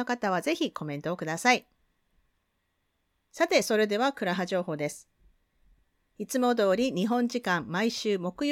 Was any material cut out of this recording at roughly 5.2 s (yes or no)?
no